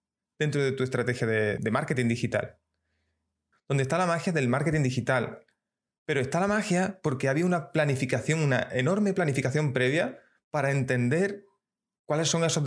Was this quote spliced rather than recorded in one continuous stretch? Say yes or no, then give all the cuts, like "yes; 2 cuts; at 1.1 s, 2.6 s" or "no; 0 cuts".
yes; 2 cuts; at 1.6 s, 3.5 s